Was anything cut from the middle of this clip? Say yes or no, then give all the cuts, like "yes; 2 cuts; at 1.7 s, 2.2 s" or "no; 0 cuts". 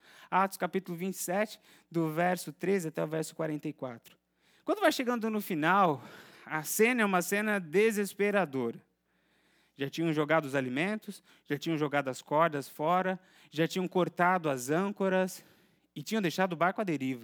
no; 0 cuts